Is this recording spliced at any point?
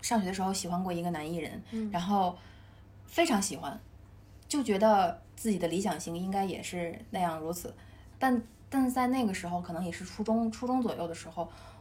yes; 2 cuts; at 5.3 s, 8.1 s

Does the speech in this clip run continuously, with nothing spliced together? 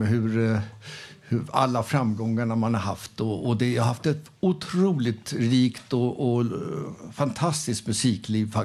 yes; 0 cuts

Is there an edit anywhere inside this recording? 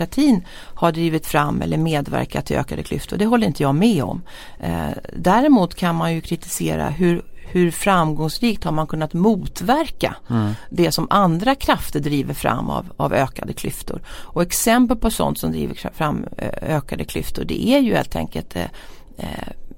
no; 0 cuts

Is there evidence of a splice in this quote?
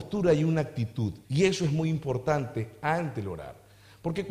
yes; 1 cut; at 1.2 s

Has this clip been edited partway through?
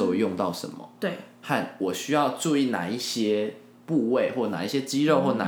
no; 0 cuts

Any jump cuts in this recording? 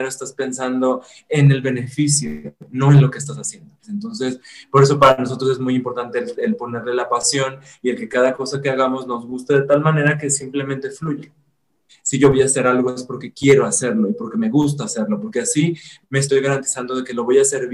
yes; 2 cuts; at 3.8 s, 11.9 s

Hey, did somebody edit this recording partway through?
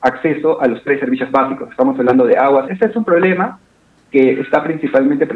yes; 1 cut; at 2.7 s

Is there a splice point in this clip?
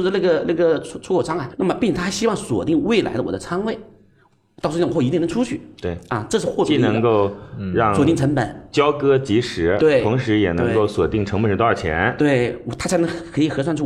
yes; 1 cut; at 1.5 s

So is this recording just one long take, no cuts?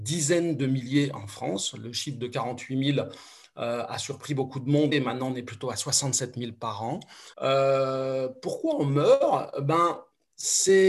no; 2 cuts; at 4.9 s, 7.3 s

